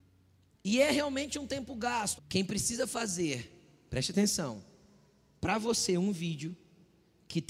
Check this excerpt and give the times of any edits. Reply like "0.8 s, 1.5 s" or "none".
2.2 s